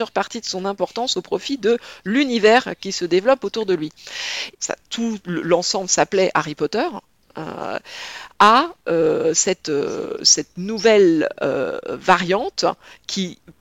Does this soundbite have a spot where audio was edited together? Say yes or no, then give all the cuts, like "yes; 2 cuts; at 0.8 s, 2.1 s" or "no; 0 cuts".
yes; 1 cut; at 4.5 s